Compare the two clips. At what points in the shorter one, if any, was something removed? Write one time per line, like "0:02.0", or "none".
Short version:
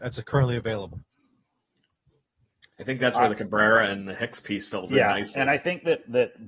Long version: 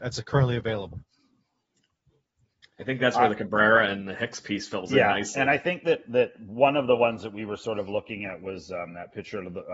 none